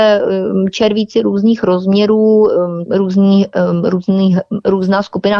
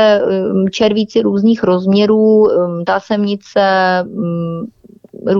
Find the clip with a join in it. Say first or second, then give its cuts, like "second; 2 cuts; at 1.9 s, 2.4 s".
first; 1 cut; at 2.9 s